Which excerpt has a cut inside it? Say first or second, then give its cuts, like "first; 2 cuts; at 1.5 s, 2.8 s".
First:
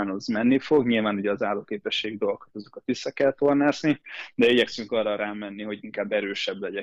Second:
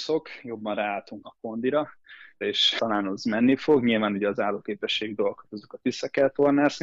second; 2 cuts; at 1.2 s, 2.4 s